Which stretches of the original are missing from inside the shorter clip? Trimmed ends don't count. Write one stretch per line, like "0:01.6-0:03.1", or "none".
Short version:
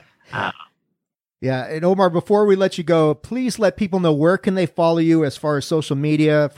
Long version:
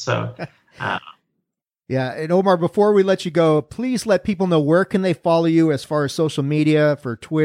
none